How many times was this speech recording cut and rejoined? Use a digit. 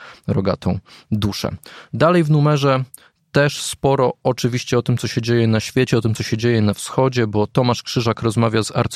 0